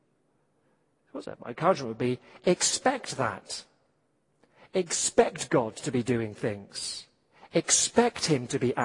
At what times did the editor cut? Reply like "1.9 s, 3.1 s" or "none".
none